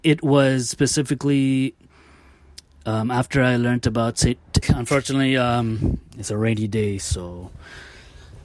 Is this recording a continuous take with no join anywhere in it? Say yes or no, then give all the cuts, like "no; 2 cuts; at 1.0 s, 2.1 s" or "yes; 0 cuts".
no; 1 cut; at 4.6 s